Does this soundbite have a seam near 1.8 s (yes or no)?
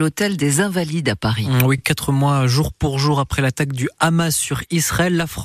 no